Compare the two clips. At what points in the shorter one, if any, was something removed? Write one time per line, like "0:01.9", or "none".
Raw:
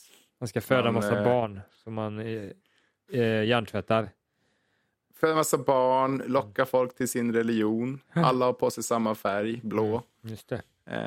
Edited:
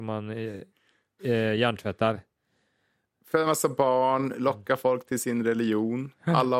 none